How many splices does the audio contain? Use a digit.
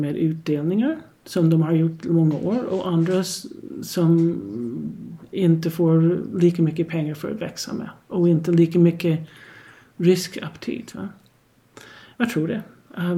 0